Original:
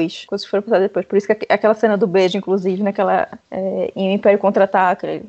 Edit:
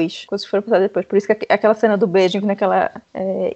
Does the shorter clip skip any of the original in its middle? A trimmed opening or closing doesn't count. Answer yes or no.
yes